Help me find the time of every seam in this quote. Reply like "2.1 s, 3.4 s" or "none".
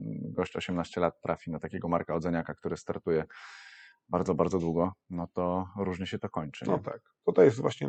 none